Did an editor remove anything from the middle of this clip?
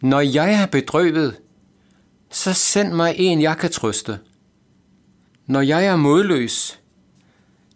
yes; 1 cut; at 5.3 s

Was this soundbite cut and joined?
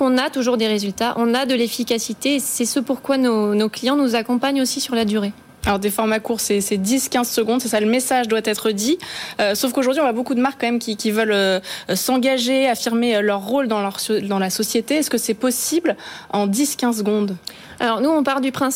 no; 0 cuts

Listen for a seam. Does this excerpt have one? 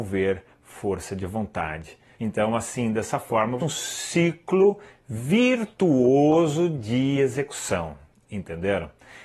yes; 2 cuts; at 2.1 s, 3.6 s

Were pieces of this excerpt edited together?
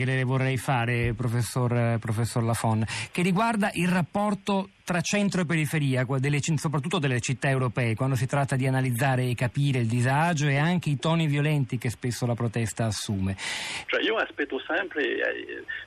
yes; 1 cut; at 13.9 s

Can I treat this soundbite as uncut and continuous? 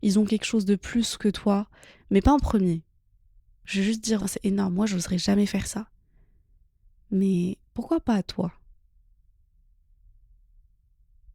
no; 2 cuts; at 1.9 s, 4.2 s

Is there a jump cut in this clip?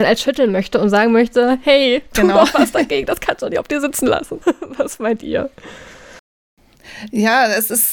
yes; 1 cut; at 4.4 s

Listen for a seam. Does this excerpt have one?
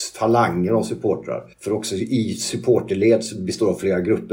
yes; 1 cut; at 1.5 s

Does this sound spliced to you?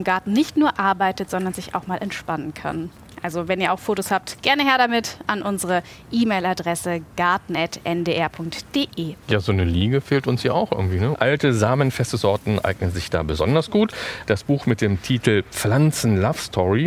yes; 3 cuts; at 9.2 s, 11.1 s, 14.2 s

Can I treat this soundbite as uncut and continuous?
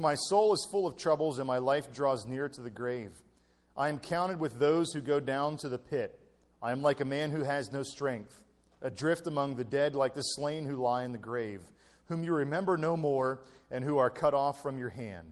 yes; 0 cuts

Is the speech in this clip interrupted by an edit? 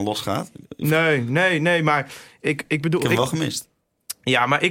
no; 0 cuts

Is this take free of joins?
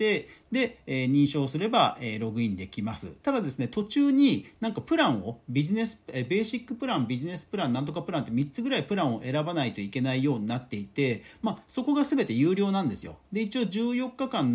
yes; 0 cuts

